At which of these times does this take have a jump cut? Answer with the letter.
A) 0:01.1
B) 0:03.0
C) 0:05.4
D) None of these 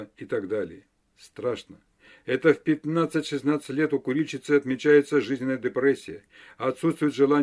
A